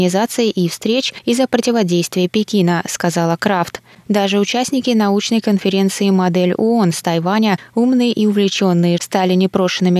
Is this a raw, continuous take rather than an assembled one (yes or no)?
no